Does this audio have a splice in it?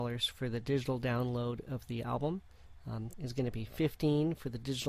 yes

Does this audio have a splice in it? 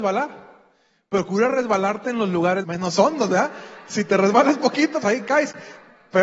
yes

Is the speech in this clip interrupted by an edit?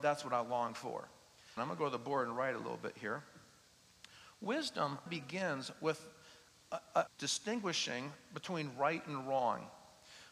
yes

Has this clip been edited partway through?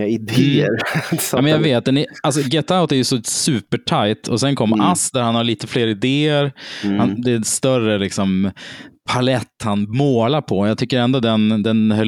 no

